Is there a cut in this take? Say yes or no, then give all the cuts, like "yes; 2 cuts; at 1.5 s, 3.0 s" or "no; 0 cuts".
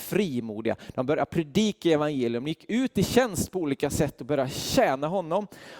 no; 0 cuts